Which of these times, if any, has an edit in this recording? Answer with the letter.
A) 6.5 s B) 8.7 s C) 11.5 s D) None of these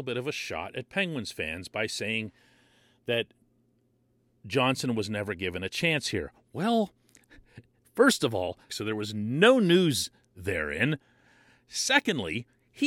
B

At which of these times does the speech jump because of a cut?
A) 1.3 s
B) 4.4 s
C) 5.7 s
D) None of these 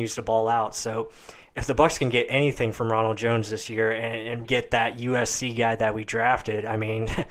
B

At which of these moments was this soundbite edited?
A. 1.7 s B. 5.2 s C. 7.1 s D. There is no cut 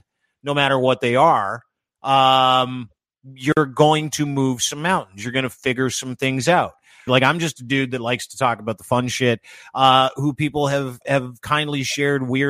C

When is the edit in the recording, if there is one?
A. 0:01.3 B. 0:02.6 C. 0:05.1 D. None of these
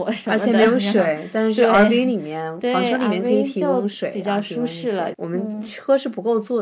C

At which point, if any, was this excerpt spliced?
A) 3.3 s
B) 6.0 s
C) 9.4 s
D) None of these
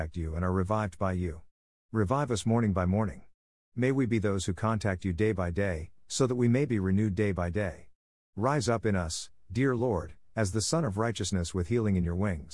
B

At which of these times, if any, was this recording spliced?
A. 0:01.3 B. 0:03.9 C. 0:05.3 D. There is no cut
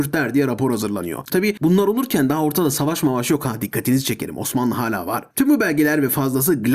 A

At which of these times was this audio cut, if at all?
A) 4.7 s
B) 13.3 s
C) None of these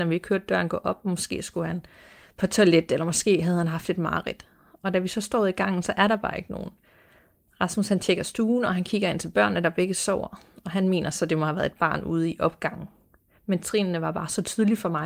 C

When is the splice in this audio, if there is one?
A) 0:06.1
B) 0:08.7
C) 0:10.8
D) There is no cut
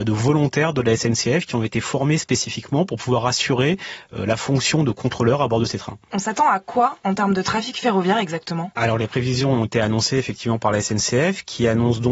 A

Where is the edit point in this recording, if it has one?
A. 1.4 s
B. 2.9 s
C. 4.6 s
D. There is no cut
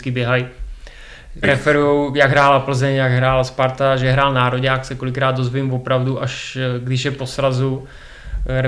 A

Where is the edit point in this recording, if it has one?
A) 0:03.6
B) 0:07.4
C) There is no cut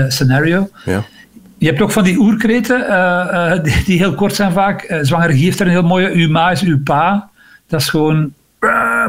C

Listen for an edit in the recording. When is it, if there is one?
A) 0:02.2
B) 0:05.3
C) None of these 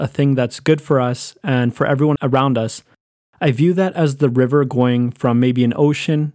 A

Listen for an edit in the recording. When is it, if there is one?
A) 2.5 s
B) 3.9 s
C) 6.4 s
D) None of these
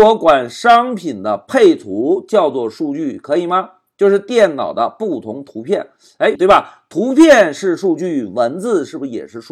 C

